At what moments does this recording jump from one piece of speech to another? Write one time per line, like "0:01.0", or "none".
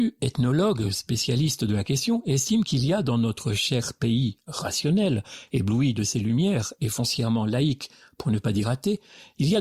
none